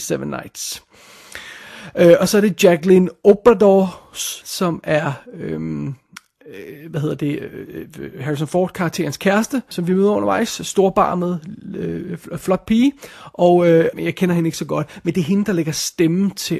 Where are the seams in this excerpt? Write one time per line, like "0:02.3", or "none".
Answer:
0:04.4
0:09.7
0:13.9